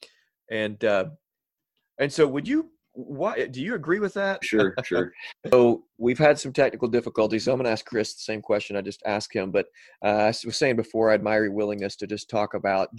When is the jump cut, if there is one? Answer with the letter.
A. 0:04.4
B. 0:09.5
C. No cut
A